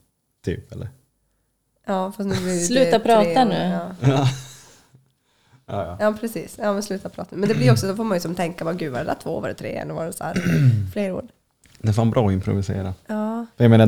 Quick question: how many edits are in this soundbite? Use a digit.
0